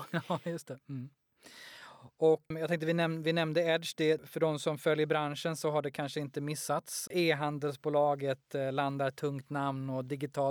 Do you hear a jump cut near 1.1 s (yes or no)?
no